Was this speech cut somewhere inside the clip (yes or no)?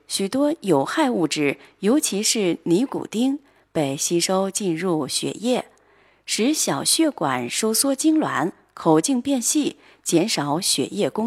no